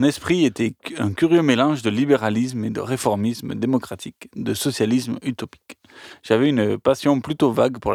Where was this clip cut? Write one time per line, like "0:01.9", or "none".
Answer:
none